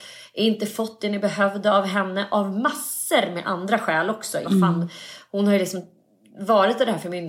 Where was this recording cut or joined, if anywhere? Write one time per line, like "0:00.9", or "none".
0:04.4

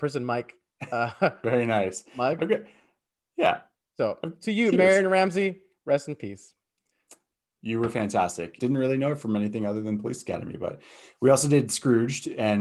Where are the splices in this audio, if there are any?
0:08.6

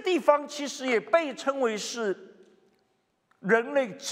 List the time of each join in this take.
none

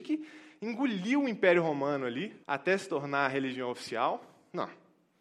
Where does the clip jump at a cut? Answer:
0:02.4

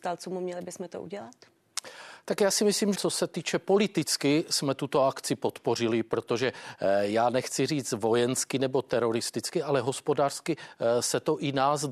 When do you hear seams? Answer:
0:02.9

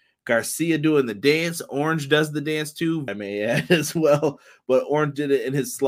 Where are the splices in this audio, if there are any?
0:03.1

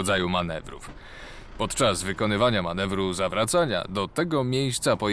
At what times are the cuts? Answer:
none

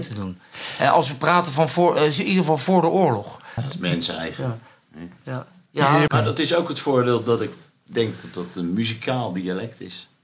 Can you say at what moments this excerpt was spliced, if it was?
0:03.6
0:06.1

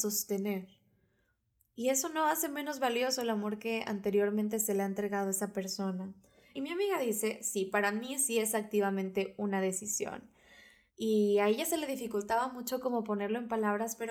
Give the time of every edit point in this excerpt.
0:06.5
0:10.9

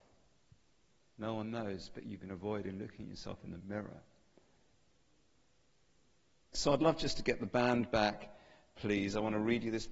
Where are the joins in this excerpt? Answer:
0:01.1
0:06.5

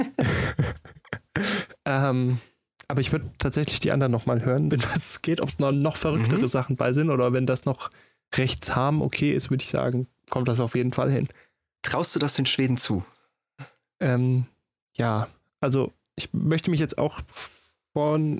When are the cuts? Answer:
0:04.7
0:11.8

